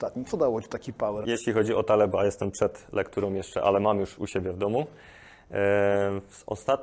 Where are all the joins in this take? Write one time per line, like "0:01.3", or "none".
0:01.2